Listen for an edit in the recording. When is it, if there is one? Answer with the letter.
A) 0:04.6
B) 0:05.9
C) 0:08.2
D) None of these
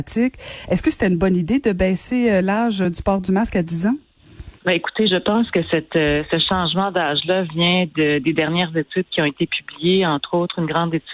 A